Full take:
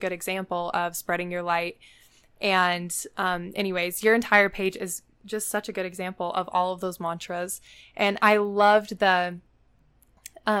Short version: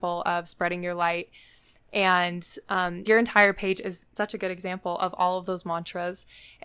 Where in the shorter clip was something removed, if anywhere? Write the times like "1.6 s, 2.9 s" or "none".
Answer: 3.1 s, 4.2 s